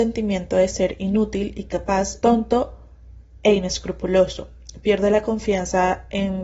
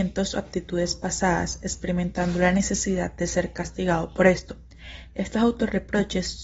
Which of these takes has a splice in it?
first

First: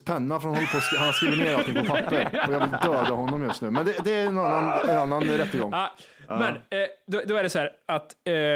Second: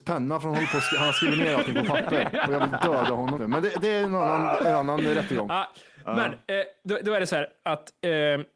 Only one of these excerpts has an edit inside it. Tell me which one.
second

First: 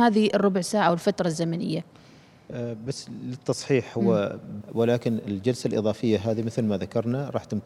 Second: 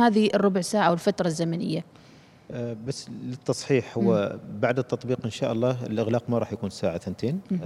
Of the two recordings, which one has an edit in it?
first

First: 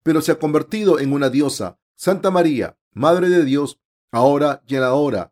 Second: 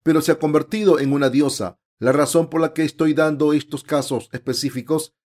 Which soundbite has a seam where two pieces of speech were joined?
first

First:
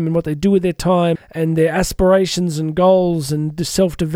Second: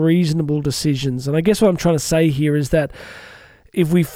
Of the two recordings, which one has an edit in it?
first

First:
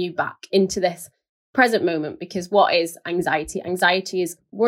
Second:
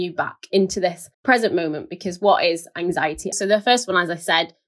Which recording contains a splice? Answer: second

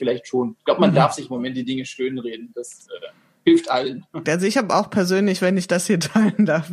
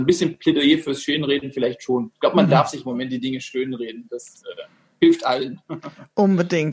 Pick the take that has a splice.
first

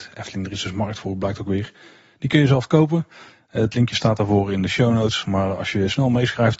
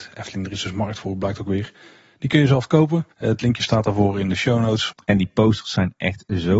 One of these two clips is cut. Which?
second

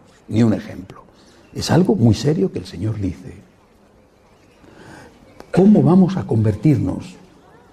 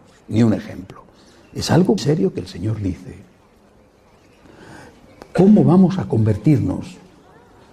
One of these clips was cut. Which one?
second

